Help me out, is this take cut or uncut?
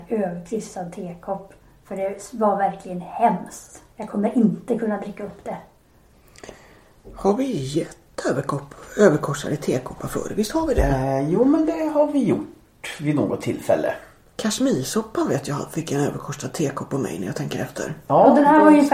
uncut